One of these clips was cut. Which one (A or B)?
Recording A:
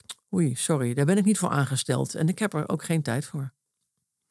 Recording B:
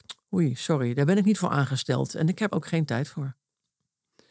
B